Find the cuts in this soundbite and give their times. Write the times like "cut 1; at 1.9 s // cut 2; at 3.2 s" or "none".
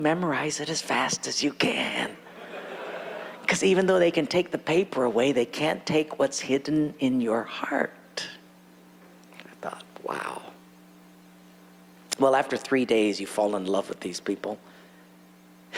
none